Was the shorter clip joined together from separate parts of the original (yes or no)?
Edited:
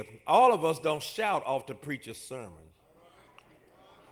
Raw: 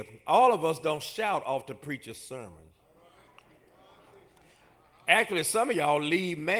no